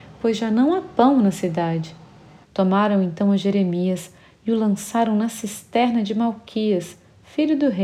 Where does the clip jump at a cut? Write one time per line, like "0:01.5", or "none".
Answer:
0:02.4

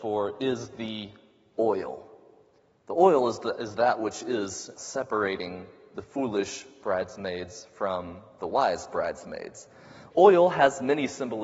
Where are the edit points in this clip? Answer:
0:04.7

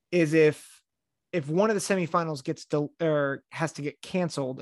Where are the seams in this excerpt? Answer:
none

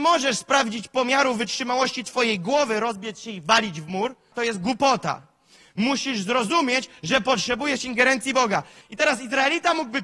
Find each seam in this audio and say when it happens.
0:04.3
0:08.8

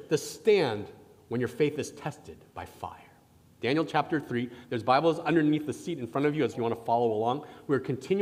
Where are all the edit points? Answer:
0:03.6
0:06.5

